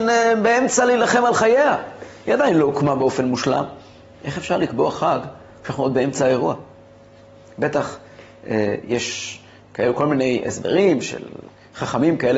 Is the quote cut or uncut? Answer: uncut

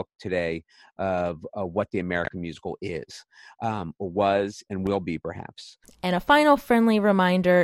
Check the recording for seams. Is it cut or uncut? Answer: cut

